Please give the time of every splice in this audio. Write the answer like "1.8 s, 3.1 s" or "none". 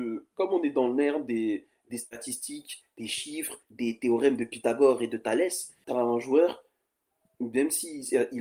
3.6 s, 5.8 s